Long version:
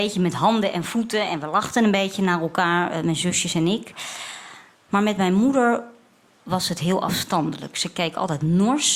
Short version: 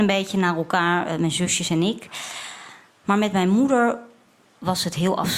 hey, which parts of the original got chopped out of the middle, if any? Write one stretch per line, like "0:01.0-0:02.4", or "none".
none